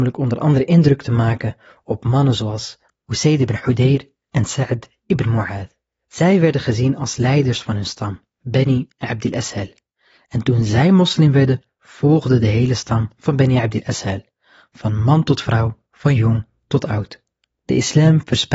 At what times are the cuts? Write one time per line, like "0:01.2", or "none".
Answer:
none